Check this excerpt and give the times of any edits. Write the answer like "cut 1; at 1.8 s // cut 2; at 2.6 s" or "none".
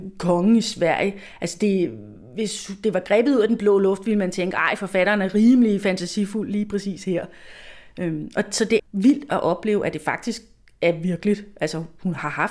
cut 1; at 8.8 s